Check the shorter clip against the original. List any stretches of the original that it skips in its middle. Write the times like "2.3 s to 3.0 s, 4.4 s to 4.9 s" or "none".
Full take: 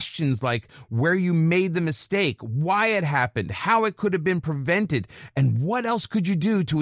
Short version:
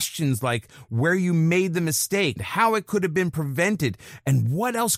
2.4 s to 3.5 s